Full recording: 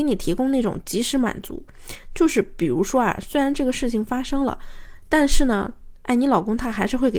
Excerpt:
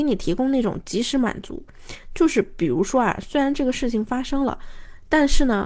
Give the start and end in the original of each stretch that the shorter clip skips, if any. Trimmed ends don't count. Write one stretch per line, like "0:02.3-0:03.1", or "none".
none

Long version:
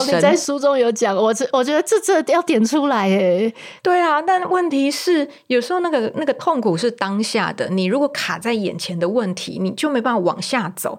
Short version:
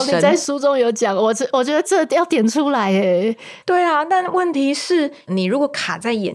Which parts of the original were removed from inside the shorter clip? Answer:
0:01.8-0:02.0
0:05.4-0:07.7

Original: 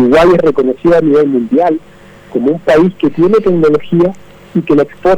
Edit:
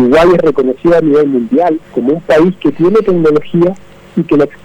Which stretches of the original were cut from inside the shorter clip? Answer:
0:01.8-0:02.2

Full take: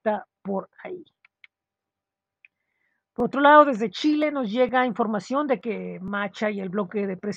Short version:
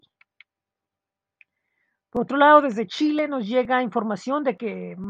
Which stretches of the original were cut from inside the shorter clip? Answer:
none

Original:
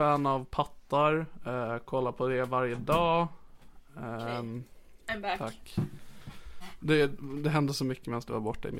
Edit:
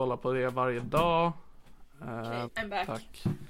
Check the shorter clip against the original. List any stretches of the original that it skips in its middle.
0:04.4-0:05.0

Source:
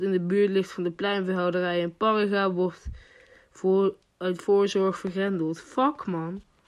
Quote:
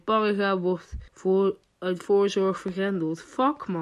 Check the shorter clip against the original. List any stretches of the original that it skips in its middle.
0:03.0-0:03.5

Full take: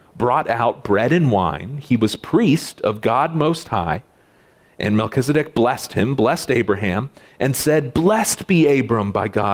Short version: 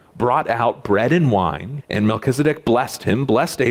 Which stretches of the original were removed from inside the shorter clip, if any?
0:01.8-0:04.7

